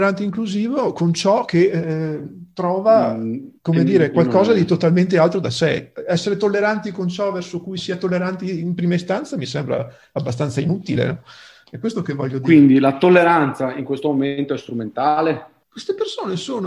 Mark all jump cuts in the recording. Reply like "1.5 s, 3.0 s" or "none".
3.6 s